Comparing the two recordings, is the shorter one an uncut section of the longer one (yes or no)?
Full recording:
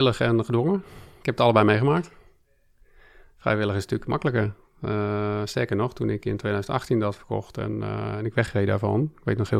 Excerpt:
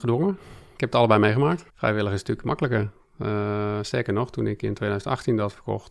no